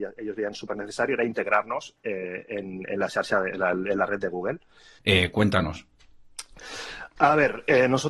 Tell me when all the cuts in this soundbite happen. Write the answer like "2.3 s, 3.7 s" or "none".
5.0 s